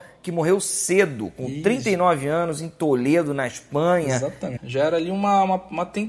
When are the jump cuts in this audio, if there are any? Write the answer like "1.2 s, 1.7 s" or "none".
4.6 s